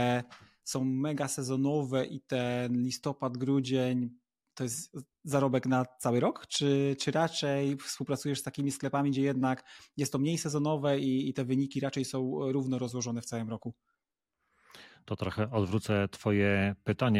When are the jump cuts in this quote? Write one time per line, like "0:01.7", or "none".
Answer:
none